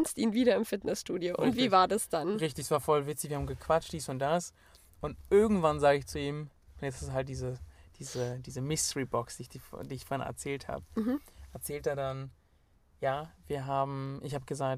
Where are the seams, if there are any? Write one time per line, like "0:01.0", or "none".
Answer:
none

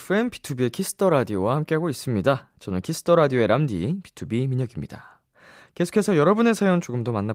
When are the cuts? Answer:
none

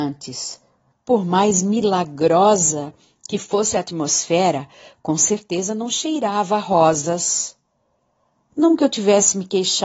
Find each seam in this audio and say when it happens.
0:00.9

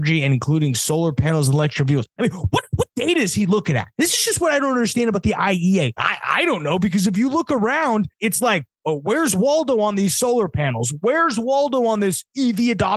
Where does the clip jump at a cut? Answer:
0:06.0

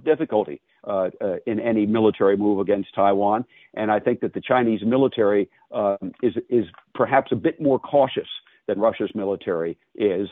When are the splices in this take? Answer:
none

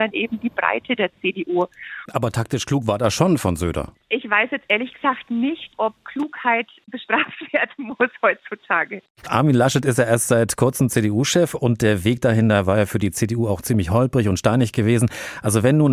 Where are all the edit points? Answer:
0:02.1

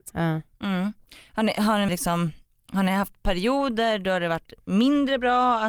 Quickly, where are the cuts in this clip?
0:01.9

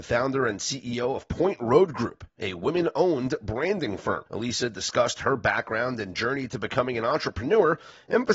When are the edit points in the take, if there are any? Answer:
0:04.3

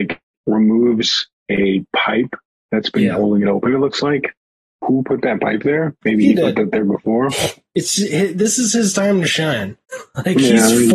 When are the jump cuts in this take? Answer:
none

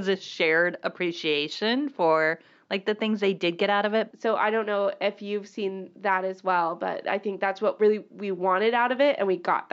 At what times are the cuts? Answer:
0:04.1

